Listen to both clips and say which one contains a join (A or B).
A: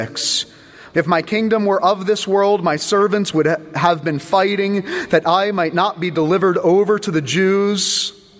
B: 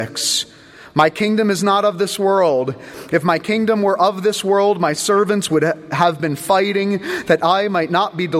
A